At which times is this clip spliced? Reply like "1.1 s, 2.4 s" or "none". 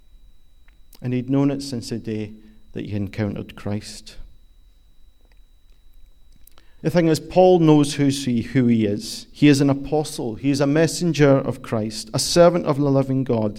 6.8 s